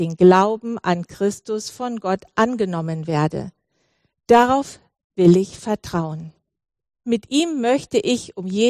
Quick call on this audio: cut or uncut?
cut